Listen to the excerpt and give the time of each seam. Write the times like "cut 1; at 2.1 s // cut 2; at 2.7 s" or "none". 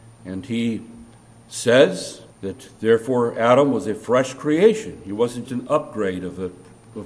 cut 1; at 2.3 s // cut 2; at 5.5 s